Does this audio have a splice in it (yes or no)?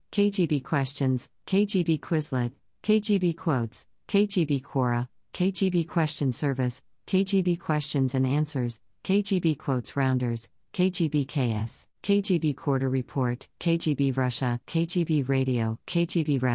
no